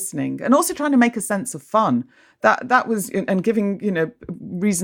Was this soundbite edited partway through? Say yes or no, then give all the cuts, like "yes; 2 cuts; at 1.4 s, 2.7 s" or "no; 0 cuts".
no; 0 cuts